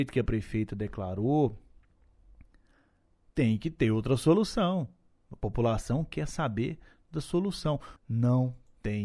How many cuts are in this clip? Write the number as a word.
one